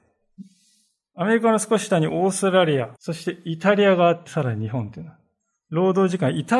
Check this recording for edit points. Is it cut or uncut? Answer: cut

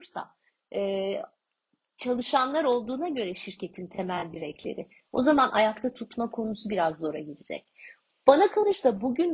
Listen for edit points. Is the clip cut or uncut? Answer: cut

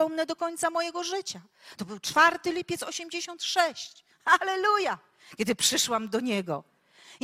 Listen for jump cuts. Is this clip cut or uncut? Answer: uncut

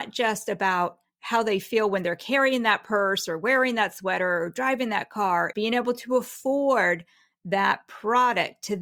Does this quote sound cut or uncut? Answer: cut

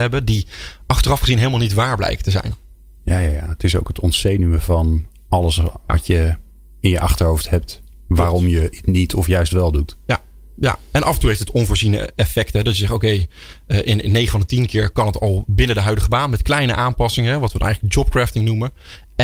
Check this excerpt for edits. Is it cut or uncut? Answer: uncut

